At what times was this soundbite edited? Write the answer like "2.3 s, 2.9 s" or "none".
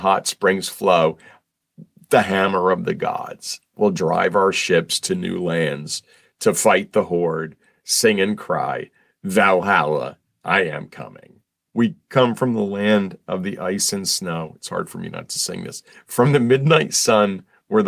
11.7 s

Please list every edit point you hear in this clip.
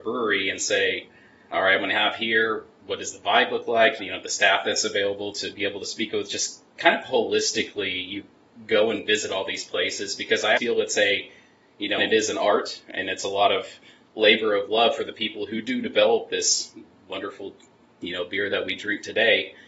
4.0 s, 10.6 s, 12.0 s

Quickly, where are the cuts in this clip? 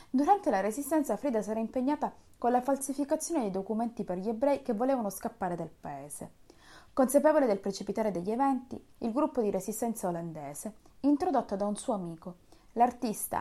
6.9 s, 9.0 s

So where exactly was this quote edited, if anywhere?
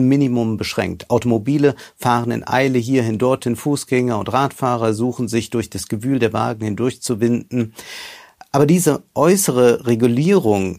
none

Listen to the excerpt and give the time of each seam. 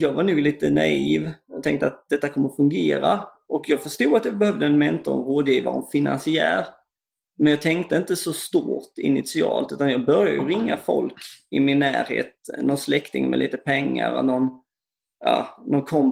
none

